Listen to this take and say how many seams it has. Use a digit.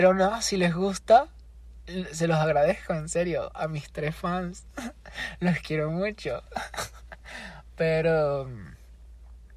0